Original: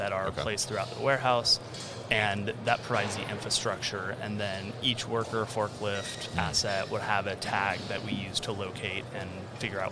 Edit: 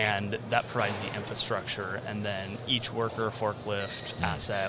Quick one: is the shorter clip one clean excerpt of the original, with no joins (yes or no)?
yes